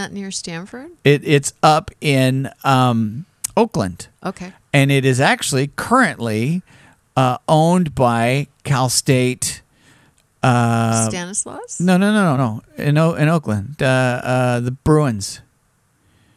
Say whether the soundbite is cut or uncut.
cut